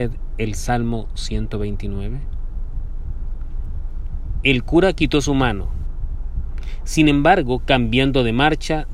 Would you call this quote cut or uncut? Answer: uncut